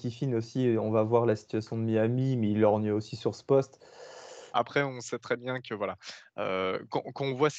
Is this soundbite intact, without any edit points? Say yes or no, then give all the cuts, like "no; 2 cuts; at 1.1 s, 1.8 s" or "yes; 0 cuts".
no; 1 cut; at 4.5 s